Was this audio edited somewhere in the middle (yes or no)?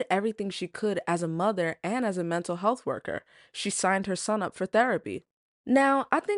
no